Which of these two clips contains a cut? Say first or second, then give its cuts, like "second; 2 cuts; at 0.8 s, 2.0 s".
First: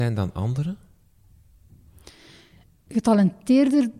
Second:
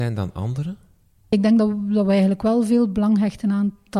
second; 1 cut; at 1.3 s